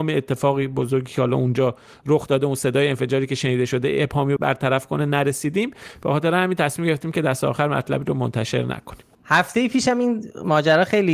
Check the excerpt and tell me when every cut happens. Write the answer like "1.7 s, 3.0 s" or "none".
4.4 s